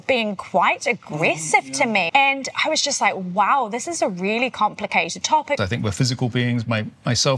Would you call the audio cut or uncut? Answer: cut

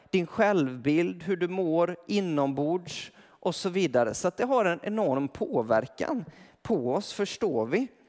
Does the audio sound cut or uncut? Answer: uncut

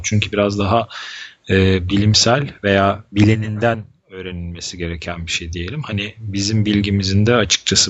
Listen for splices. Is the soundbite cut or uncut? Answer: uncut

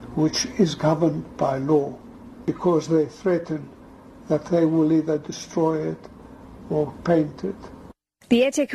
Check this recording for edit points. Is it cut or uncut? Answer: cut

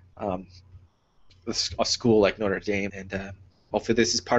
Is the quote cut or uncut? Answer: cut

